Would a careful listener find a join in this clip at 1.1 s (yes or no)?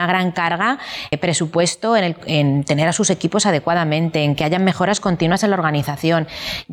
yes